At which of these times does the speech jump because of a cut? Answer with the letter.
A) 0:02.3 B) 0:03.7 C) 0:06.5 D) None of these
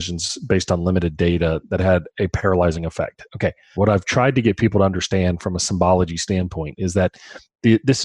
B